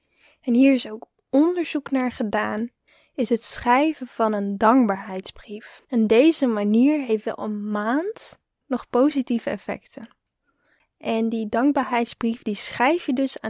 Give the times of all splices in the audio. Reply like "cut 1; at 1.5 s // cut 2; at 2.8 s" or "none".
cut 1; at 8.6 s